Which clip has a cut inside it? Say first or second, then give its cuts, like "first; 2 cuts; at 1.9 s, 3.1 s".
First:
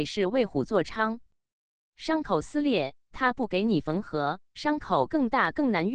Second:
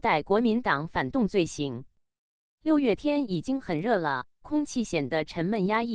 first; 1 cut; at 4.5 s